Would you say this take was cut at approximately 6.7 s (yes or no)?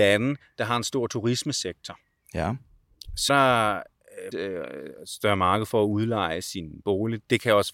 no